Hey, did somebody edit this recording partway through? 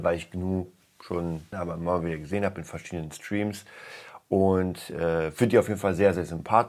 yes; 1 cut; at 1.5 s

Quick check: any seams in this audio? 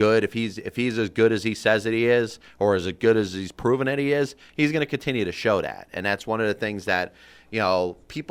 no; 0 cuts

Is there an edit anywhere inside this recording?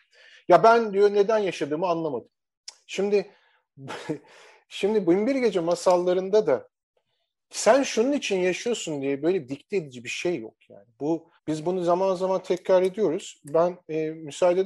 yes; 1 cut; at 11.4 s

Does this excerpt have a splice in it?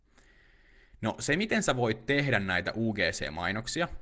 no; 0 cuts

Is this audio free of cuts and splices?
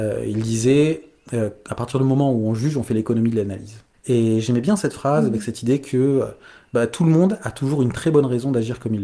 yes; 0 cuts

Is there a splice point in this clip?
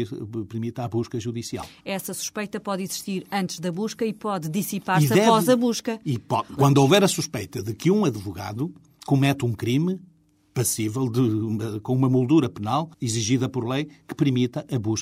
yes; 2 cuts; at 6.6 s, 12.9 s

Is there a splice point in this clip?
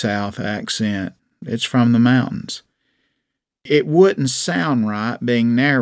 no; 0 cuts

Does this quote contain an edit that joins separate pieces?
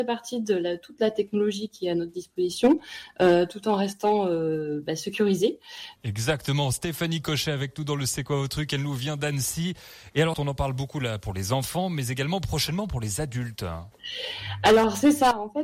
yes; 2 cuts; at 6.0 s, 10.3 s

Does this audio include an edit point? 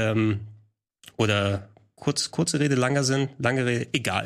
no; 0 cuts

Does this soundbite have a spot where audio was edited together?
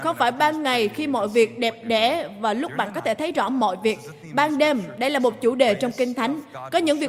no; 0 cuts

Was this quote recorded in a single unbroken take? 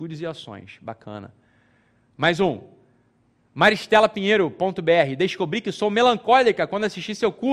yes; 0 cuts

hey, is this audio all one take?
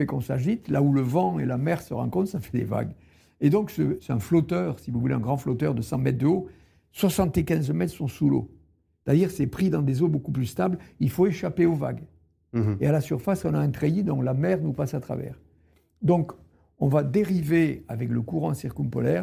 no; 1 cut; at 4.0 s

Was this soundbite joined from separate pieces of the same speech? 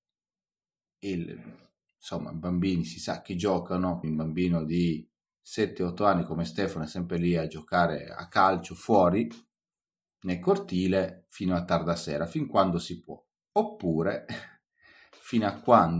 yes; 1 cut; at 4.0 s

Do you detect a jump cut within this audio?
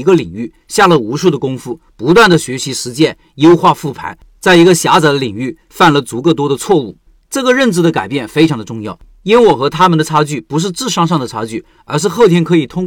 no; 0 cuts

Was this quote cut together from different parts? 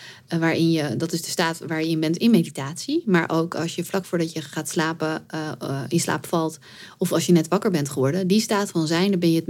no; 0 cuts

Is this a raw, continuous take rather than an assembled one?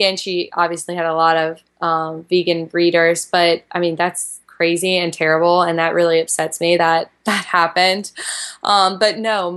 yes; 0 cuts

